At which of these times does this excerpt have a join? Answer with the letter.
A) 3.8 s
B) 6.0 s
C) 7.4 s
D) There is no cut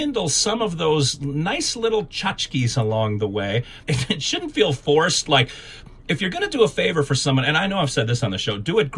A